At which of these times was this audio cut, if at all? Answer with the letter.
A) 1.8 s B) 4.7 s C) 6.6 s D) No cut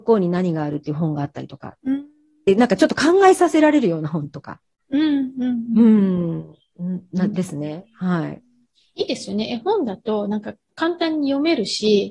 A